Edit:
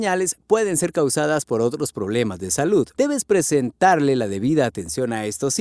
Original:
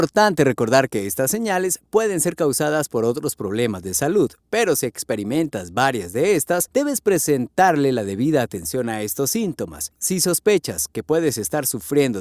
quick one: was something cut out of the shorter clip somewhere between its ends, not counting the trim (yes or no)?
yes